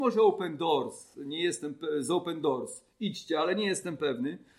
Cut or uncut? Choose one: uncut